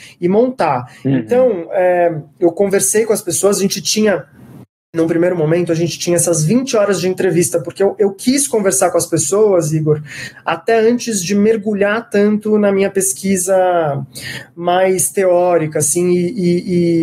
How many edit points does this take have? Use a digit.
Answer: 0